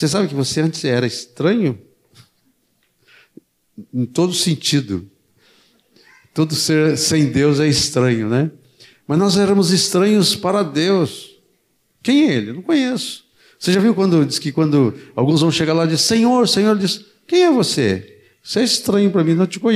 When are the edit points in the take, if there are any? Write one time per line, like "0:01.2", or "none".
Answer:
none